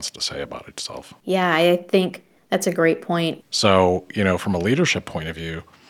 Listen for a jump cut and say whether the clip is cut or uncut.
cut